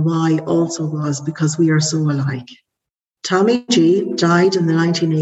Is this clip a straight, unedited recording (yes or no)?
no